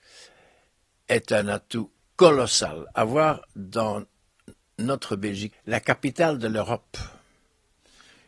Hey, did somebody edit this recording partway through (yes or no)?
yes